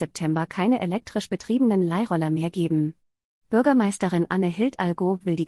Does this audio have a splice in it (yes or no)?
no